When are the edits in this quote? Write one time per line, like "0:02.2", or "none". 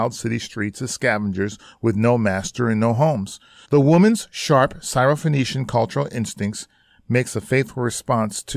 0:03.6